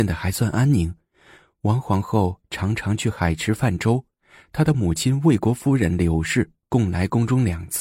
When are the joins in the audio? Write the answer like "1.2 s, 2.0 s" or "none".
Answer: none